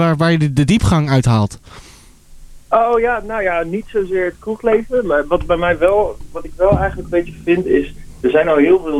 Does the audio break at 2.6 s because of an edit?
no; 0 cuts

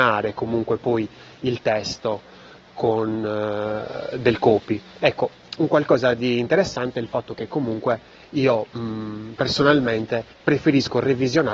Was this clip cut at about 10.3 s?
yes; 1 cut; at 10.3 s

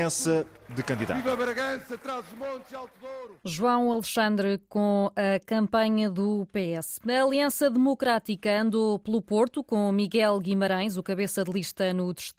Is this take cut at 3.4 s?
yes; 1 cut; at 3.4 s

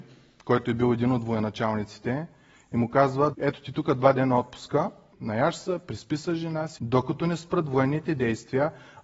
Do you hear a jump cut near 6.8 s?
yes; 3 cuts; at 3.3 s, 5.1 s, 6.8 s

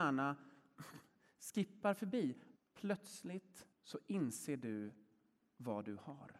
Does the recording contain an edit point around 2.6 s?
yes; 2 cuts; at 2.6 s, 3.7 s

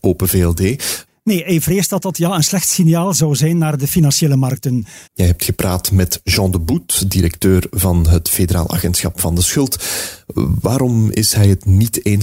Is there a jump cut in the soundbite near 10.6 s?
no; 2 cuts; at 1.1 s, 5.1 s

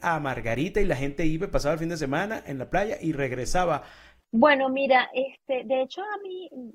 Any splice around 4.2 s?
yes; 1 cut; at 4.2 s

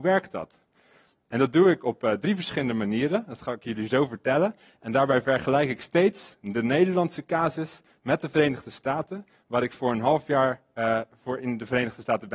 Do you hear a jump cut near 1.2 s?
no; 0 cuts

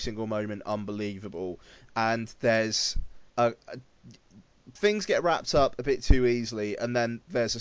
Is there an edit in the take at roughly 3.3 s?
yes; 1 cut; at 3.3 s

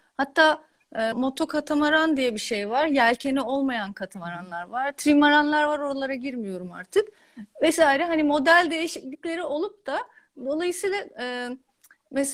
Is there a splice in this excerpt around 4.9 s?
no; 1 cut; at 1.1 s

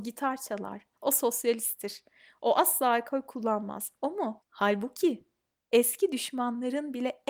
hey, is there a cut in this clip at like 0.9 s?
yes; 2 cuts; at 0.9 s, 4.4 s

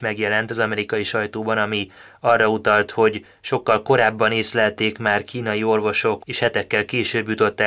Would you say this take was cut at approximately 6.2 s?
yes; 1 cut; at 6.2 s

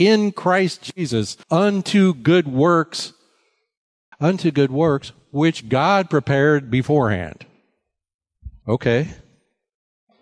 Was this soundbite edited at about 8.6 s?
yes; 3 cuts; at 1.4 s, 4.1 s, 8.6 s

